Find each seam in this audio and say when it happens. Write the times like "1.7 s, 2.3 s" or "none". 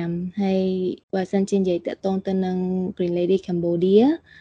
1.0 s